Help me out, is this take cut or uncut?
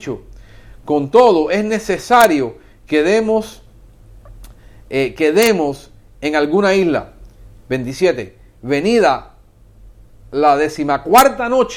uncut